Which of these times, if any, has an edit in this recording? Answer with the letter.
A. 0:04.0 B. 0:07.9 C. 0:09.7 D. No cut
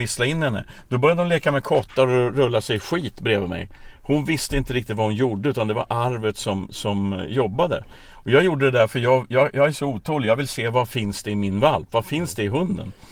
D